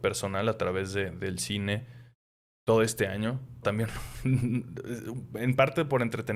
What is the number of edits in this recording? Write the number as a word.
one